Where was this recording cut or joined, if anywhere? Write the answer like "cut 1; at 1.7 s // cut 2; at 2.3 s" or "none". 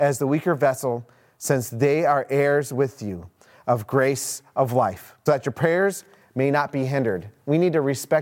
cut 1; at 5.3 s